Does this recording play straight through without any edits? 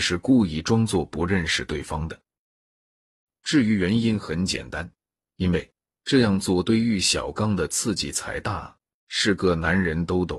no; 1 cut; at 9.1 s

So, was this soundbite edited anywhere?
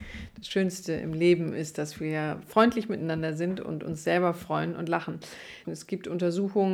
yes; 1 cut; at 5.6 s

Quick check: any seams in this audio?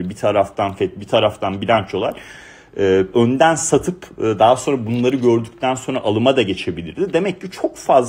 yes; 1 cut; at 3.1 s

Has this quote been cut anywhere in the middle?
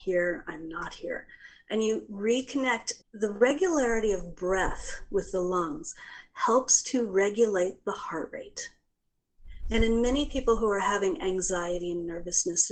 yes; 1 cut; at 3.0 s

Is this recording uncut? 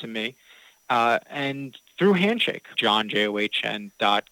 no; 1 cut; at 2.7 s

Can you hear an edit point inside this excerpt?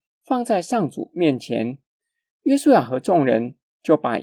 no; 0 cuts

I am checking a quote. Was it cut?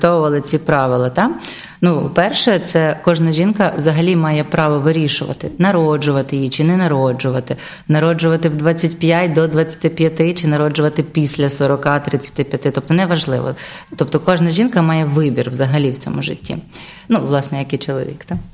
no; 0 cuts

